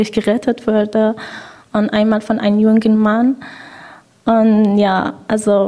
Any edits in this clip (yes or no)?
no